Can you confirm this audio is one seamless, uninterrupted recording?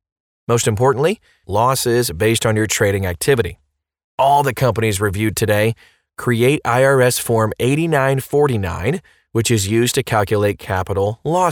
no; 1 cut; at 1.4 s

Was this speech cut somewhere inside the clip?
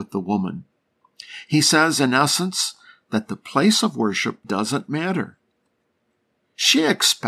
yes; 1 cut; at 4.4 s

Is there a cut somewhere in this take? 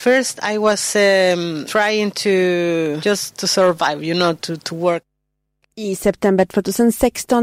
no; 0 cuts

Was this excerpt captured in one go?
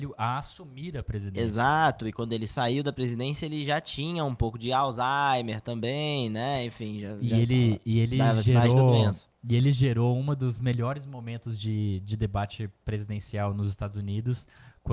yes; 0 cuts

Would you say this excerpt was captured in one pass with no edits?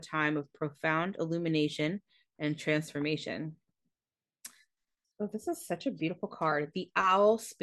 no; 1 cut; at 5.0 s

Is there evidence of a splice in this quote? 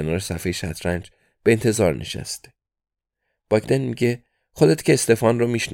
no; 0 cuts

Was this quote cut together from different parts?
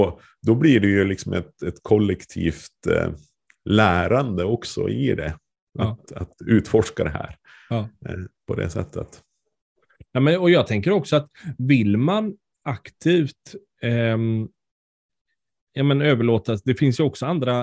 no; 0 cuts

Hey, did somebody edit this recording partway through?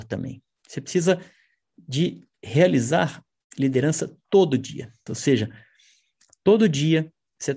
yes; 1 cut; at 5.1 s

